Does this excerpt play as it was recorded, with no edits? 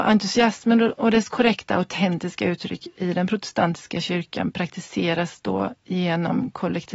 yes; 0 cuts

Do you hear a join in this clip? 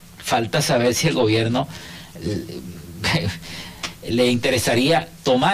yes; 1 cut; at 4.1 s

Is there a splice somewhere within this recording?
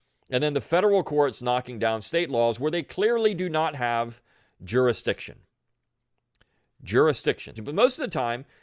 yes; 1 cut; at 7.6 s

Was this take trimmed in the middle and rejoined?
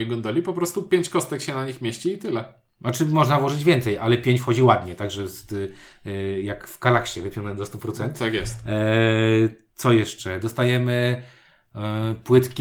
no; 0 cuts

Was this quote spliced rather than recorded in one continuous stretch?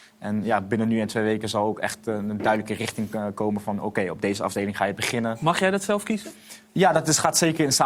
no; 0 cuts

